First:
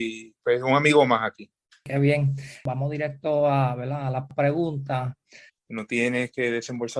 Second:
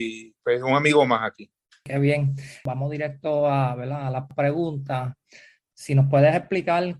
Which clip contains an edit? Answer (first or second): first